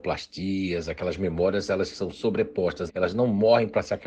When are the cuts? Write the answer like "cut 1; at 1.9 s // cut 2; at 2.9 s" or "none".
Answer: cut 1; at 2.9 s